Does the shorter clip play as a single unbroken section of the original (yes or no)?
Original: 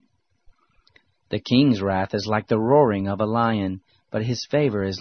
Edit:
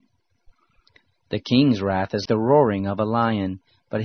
no